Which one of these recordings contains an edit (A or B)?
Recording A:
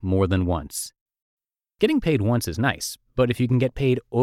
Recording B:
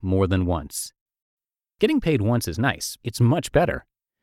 B